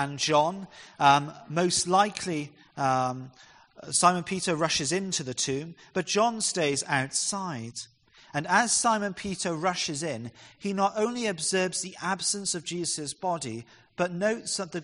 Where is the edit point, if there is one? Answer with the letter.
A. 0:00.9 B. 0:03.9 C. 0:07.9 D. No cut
D